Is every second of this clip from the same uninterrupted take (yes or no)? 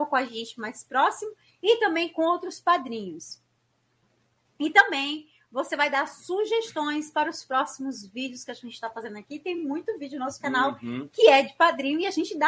yes